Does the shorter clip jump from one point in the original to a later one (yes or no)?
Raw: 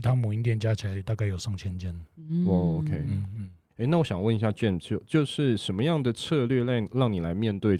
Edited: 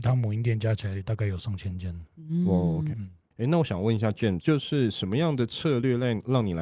yes